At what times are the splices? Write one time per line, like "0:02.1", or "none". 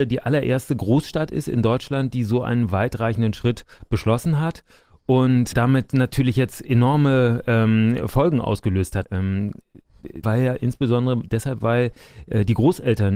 0:05.5
0:09.0
0:10.2